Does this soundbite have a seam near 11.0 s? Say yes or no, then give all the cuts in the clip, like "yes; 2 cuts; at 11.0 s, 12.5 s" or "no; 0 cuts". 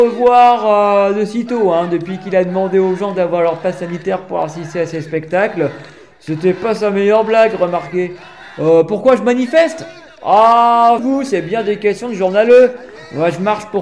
yes; 1 cut; at 11.0 s